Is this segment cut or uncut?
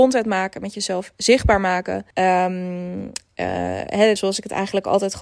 cut